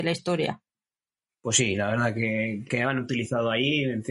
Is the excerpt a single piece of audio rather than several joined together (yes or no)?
no